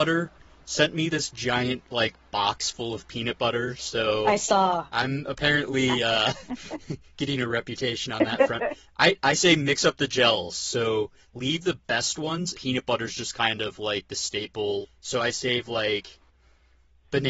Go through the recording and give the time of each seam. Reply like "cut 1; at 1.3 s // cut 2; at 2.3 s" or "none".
cut 1; at 12.5 s // cut 2; at 14.8 s